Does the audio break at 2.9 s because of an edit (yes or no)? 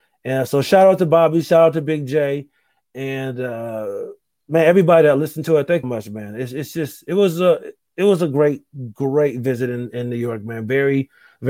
no